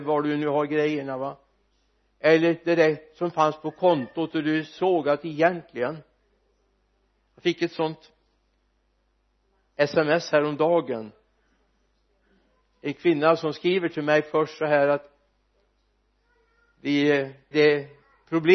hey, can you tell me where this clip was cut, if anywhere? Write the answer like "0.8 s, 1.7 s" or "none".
17.5 s